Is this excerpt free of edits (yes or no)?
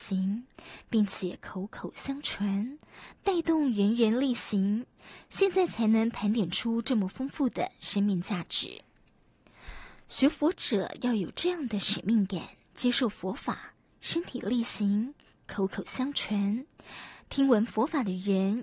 yes